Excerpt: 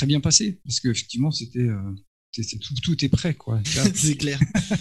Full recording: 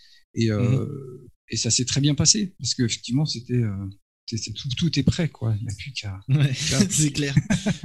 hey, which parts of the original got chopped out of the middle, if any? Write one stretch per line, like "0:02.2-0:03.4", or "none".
0:05.6-0:06.6